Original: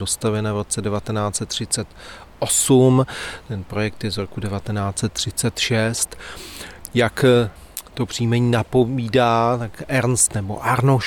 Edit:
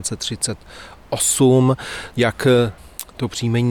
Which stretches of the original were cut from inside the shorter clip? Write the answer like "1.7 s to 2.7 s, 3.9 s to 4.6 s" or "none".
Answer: 3.4 s to 6.9 s